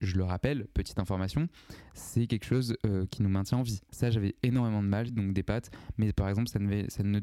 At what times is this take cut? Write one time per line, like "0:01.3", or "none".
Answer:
0:03.9
0:05.1